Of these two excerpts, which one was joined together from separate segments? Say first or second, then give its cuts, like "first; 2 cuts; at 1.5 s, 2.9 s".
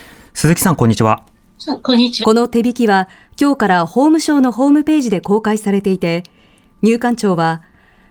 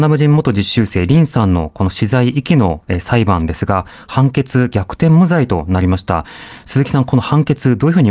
first; 1 cut; at 2.2 s